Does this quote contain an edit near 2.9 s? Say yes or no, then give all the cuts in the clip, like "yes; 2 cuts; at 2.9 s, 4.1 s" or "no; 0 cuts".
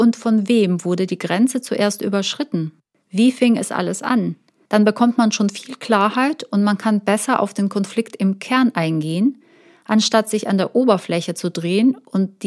no; 0 cuts